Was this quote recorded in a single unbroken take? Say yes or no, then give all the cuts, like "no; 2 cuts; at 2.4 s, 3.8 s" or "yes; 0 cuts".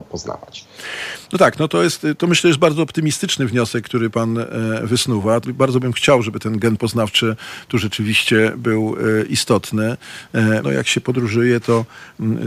no; 3 cuts; at 2.2 s, 5.4 s, 10.6 s